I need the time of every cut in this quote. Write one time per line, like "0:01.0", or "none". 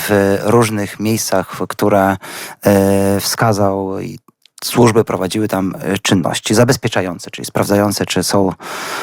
none